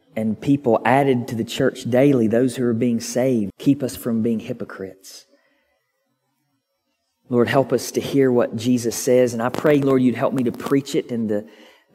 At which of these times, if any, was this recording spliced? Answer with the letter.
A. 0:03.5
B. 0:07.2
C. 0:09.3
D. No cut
A